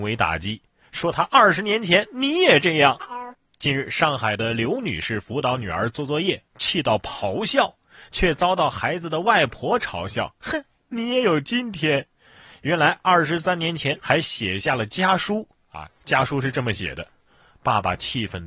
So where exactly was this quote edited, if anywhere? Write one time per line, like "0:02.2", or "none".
0:14.0